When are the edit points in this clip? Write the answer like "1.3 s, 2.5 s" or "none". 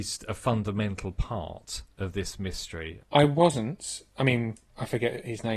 3.0 s